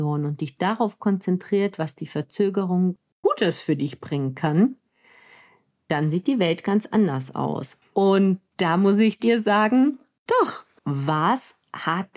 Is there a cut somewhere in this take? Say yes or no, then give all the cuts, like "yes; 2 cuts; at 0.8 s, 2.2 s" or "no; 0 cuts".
yes; 2 cuts; at 7.8 s, 10.8 s